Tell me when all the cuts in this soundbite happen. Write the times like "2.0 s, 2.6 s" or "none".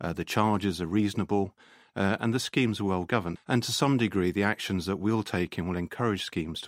3.4 s